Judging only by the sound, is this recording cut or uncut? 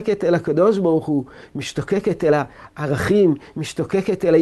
uncut